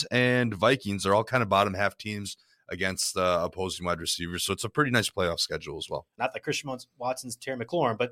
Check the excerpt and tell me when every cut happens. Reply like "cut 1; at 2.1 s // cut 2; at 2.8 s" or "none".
cut 1; at 6.2 s